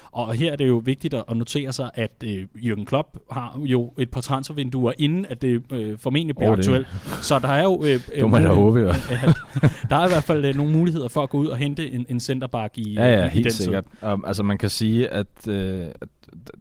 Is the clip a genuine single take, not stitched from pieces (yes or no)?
yes